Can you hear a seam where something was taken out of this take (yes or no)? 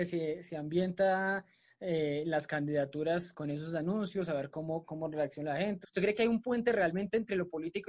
yes